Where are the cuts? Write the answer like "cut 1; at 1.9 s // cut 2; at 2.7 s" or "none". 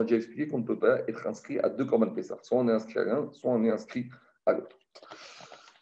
none